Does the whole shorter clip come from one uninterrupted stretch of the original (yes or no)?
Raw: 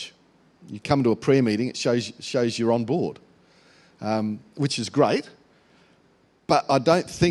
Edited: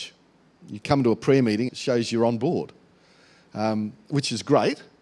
no